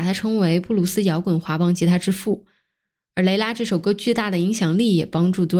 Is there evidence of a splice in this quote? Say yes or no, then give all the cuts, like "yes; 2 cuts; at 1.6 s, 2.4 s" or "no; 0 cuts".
no; 0 cuts